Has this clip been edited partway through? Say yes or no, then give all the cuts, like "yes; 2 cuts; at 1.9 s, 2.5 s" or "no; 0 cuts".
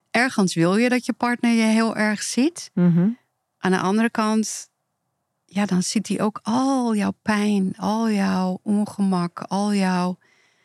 no; 0 cuts